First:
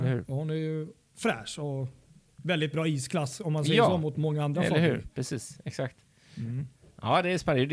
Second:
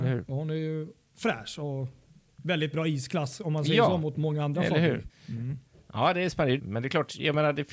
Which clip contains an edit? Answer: second; 2 cuts; at 5.1 s, 6.6 s

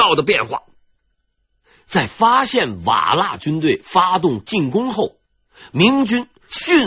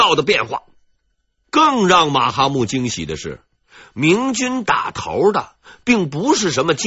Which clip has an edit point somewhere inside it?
second; 1 cut; at 1.4 s

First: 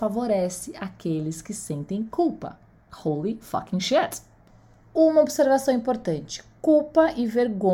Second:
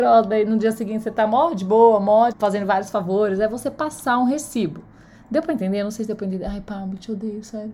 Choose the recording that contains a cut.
second; 1 cut; at 2.3 s

